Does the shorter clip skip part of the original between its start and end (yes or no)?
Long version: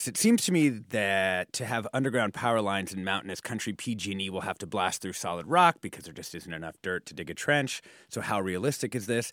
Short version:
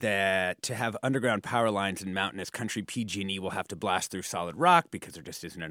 no